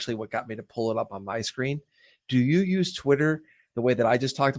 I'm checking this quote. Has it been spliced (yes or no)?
no